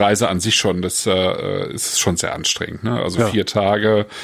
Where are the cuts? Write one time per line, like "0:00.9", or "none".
none